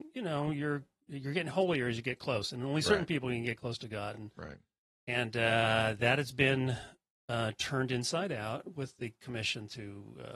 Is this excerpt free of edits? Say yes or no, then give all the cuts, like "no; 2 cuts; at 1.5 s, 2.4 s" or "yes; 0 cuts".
yes; 0 cuts